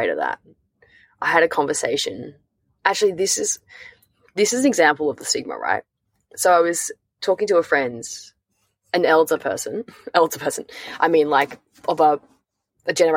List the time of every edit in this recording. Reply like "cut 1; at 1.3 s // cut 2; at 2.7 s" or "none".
none

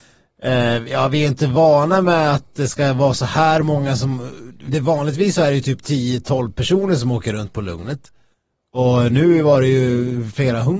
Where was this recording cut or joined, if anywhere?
cut 1; at 4.7 s

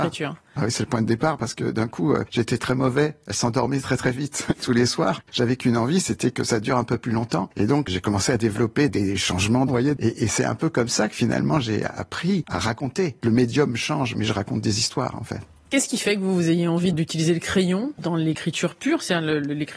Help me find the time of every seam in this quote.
cut 1; at 4.6 s // cut 2; at 9.7 s // cut 3; at 13.2 s

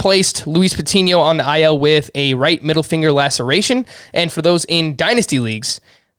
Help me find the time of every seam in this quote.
none

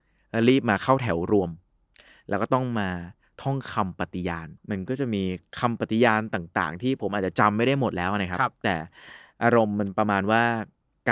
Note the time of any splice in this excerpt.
cut 1; at 4.6 s

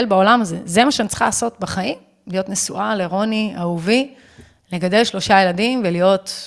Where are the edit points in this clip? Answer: none

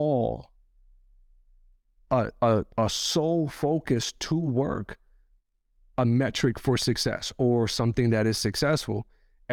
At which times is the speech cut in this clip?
none

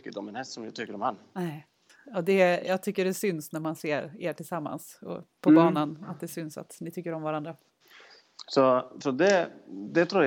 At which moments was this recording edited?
none

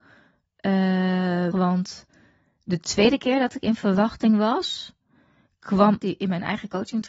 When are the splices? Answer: cut 1; at 1.5 s // cut 2; at 6.0 s

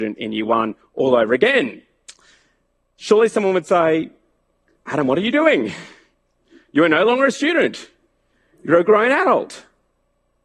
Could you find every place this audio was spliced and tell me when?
none

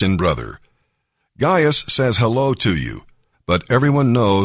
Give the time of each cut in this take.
cut 1; at 3.3 s

